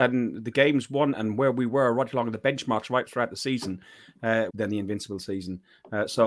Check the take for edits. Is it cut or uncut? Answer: cut